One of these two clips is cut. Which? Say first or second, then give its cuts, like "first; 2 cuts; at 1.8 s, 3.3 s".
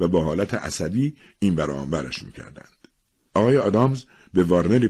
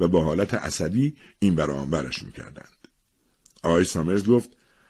first; 1 cut; at 3.3 s